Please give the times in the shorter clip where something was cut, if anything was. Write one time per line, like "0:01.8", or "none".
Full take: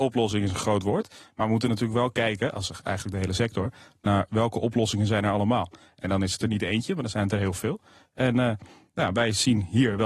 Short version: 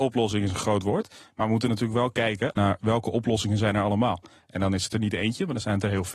0:02.5